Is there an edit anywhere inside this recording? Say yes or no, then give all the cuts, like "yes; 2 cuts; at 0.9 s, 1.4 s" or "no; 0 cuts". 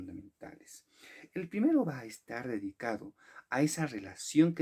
no; 0 cuts